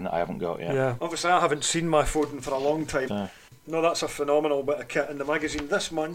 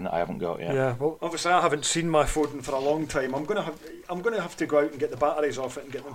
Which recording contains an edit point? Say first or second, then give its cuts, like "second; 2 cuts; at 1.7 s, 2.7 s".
first; 2 cuts; at 1.0 s, 3.1 s